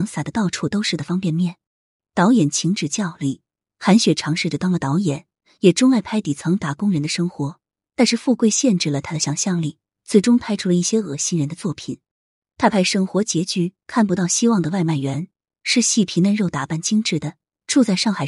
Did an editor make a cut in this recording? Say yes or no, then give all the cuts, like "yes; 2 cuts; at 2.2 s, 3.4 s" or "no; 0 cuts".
no; 0 cuts